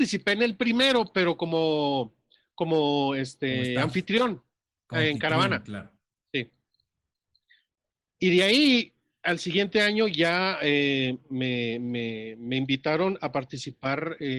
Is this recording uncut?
yes; 0 cuts

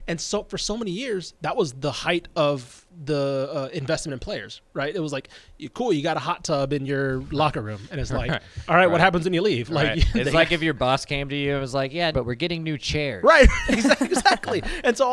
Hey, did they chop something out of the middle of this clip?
yes; 1 cut; at 12.1 s

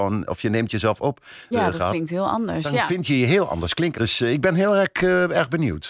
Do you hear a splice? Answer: yes; 2 cuts; at 1.5 s, 3.9 s

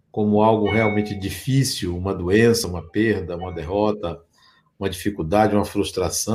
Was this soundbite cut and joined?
no; 0 cuts

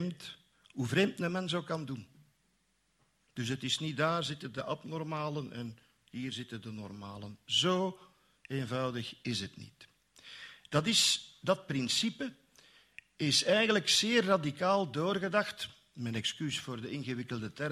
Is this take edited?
no; 0 cuts

